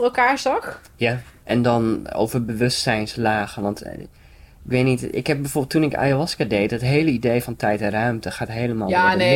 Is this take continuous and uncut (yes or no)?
no